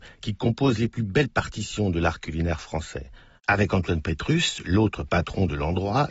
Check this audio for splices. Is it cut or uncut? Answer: cut